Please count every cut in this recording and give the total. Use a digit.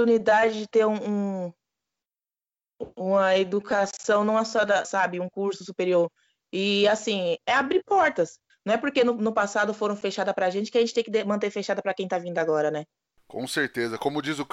3